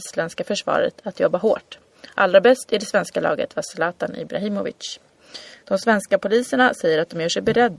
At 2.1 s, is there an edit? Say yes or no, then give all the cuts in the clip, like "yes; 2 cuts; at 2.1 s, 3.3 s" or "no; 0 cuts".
no; 1 cut; at 5.6 s